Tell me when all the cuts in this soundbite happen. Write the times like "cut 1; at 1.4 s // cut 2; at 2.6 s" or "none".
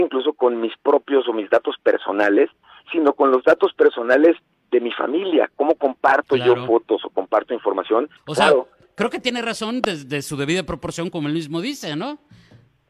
cut 1; at 8.2 s